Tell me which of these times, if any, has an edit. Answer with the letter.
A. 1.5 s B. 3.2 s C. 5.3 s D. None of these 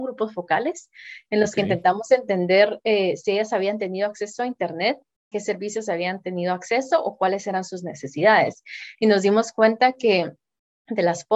C